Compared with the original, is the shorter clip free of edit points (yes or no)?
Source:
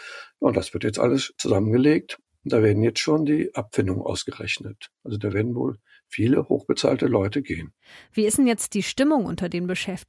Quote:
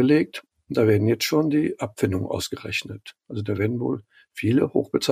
yes